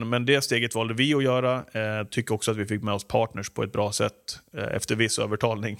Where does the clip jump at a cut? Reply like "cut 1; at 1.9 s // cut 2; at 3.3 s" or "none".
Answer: none